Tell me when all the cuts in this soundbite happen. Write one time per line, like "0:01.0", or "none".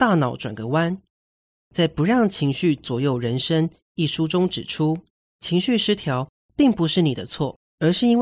0:01.6